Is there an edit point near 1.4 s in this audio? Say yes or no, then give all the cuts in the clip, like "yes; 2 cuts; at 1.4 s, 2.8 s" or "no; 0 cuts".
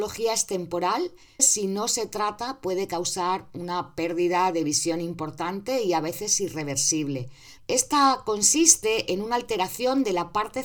yes; 2 cuts; at 1.4 s, 7.6 s